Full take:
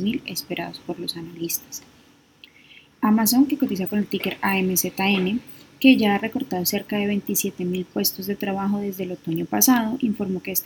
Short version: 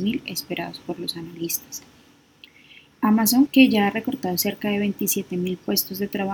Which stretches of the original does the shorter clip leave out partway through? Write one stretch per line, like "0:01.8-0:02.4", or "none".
0:03.5-0:05.7